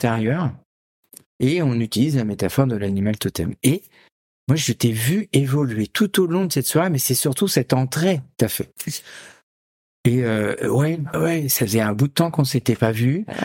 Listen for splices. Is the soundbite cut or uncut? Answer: cut